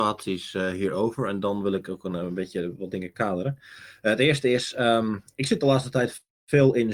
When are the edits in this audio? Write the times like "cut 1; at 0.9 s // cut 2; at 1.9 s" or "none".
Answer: none